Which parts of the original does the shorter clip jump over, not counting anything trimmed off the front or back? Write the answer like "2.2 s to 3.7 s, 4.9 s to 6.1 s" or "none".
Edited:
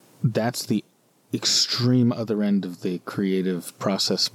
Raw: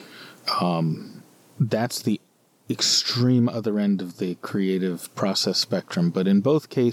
none